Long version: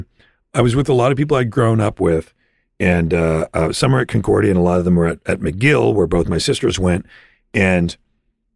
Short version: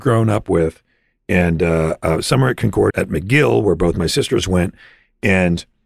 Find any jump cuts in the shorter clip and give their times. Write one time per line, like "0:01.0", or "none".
0:02.9